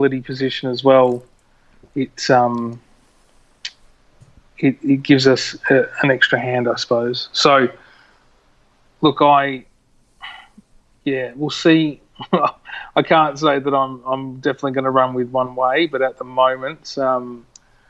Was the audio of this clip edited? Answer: no; 0 cuts

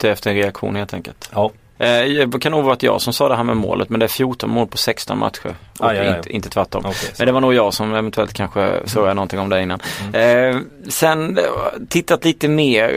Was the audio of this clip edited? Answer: yes; 1 cut; at 1.8 s

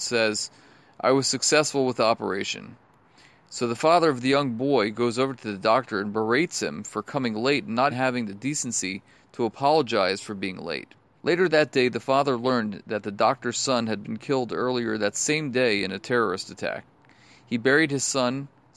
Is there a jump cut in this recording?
yes; 2 cuts; at 7.9 s, 11.2 s

